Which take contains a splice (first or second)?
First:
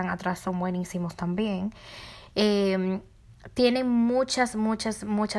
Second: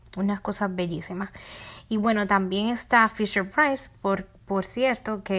first